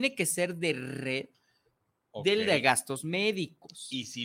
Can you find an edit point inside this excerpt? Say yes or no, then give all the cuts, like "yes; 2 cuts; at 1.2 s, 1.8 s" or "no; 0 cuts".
no; 0 cuts